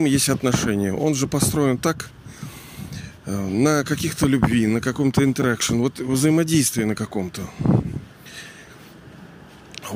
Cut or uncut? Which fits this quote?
uncut